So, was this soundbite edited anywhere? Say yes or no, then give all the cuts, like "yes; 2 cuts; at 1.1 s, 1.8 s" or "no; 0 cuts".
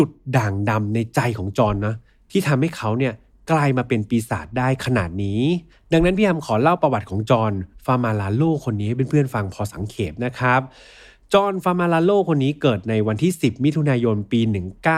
no; 0 cuts